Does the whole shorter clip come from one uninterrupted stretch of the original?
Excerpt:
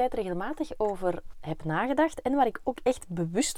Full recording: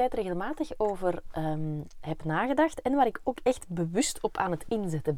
no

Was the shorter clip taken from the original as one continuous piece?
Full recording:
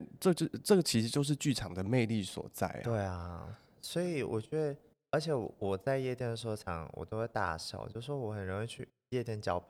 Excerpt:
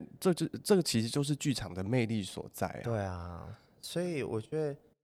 yes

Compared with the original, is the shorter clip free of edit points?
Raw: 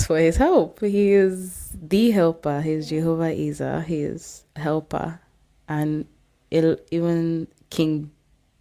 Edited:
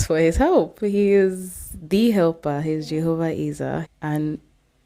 no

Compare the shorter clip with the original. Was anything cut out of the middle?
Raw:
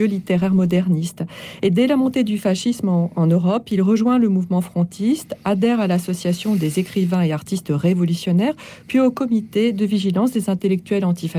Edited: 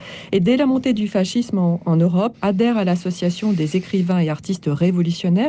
yes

